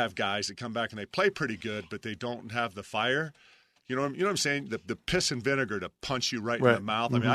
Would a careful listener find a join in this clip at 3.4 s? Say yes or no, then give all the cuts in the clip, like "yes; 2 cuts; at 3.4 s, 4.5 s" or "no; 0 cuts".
no; 0 cuts